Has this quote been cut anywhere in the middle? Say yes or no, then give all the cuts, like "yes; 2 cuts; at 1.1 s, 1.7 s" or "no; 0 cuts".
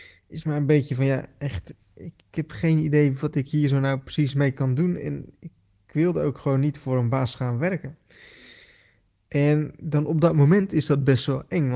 no; 0 cuts